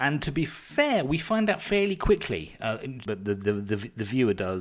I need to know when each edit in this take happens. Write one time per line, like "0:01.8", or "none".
0:03.1